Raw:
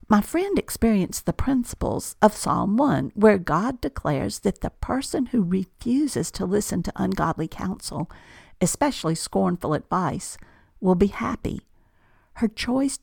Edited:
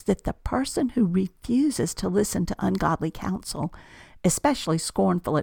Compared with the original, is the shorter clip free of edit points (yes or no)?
yes